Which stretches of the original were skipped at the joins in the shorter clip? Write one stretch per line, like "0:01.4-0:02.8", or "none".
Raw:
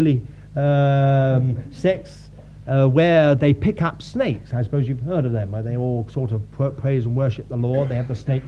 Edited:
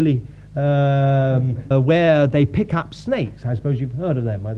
0:01.7-0:02.8